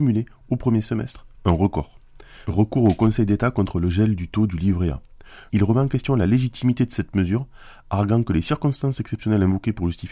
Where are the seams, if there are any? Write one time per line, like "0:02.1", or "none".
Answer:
0:02.4
0:05.5